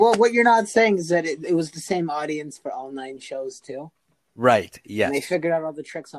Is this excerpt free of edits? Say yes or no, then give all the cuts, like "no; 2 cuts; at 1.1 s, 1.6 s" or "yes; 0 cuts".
yes; 0 cuts